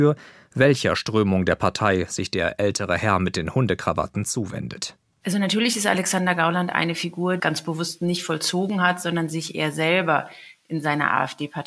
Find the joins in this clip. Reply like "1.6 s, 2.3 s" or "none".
7.4 s